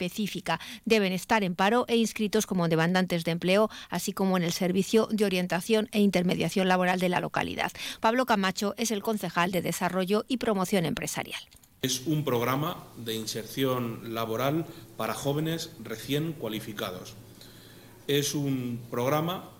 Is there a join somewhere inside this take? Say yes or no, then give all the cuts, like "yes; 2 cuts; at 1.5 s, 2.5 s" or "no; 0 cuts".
yes; 1 cut; at 8.0 s